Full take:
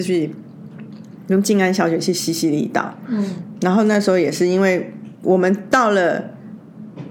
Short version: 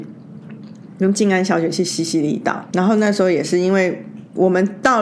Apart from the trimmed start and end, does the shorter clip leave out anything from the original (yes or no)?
yes